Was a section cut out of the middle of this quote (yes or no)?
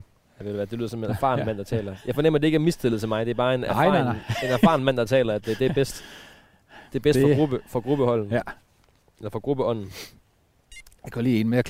no